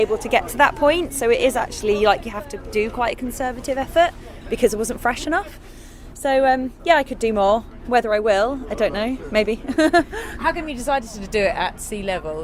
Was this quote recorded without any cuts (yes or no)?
yes